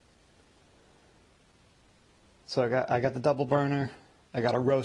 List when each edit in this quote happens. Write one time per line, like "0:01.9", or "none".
none